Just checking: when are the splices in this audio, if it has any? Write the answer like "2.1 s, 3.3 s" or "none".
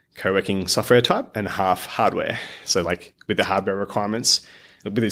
none